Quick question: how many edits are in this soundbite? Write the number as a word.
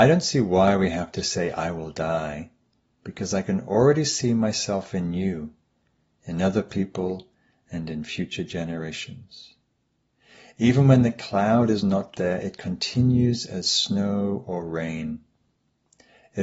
zero